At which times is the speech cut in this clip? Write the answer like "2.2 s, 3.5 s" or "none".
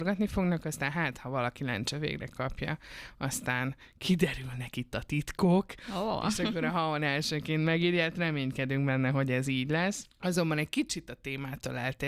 10.1 s